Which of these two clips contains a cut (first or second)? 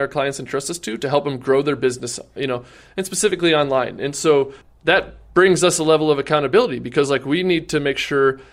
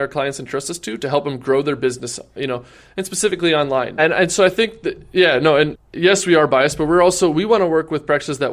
second